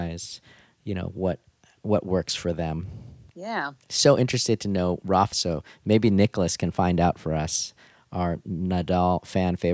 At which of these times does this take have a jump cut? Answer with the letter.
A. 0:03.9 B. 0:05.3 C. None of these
B